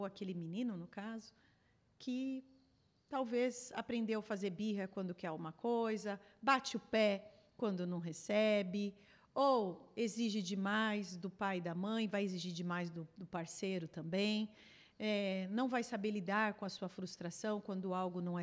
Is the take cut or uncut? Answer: uncut